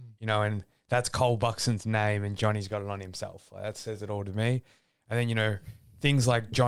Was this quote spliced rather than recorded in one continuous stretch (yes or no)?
no